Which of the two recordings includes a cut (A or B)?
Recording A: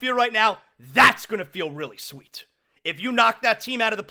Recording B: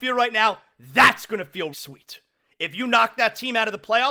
B